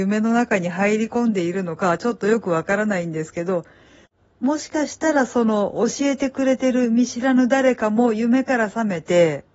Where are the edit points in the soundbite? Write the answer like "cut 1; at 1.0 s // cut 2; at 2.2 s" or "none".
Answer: none